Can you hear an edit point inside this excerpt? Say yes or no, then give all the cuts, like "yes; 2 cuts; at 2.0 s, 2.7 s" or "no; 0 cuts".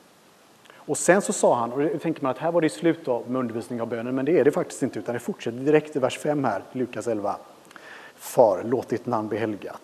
yes; 1 cut; at 8.1 s